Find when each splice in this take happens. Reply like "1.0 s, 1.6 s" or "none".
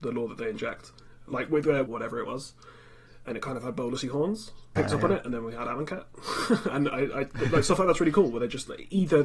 1.9 s, 4.8 s